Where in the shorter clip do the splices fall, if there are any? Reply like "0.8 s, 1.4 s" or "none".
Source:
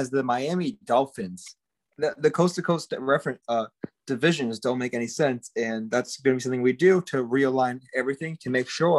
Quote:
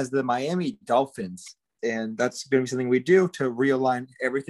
1.8 s